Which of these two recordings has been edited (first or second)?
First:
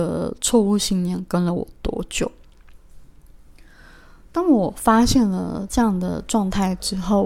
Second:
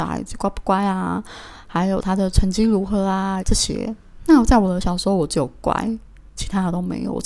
second